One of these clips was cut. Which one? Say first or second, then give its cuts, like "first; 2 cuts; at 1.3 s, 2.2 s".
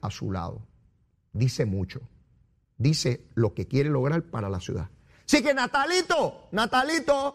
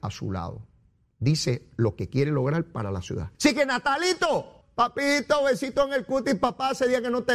second; 3 cuts; at 1.1 s, 3.3 s, 4.6 s